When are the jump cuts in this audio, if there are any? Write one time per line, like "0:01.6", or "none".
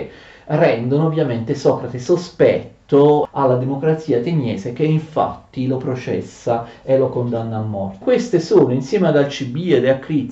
0:08.0